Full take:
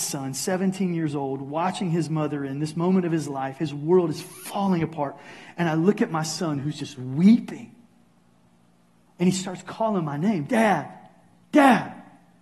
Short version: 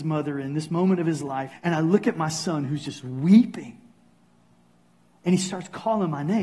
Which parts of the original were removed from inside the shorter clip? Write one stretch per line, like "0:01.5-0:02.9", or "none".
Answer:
0:03.6-0:05.5